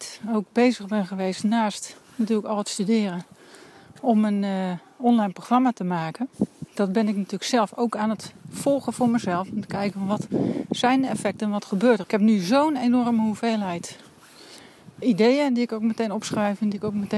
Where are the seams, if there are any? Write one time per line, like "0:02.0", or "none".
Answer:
0:06.7
0:12.0
0:15.0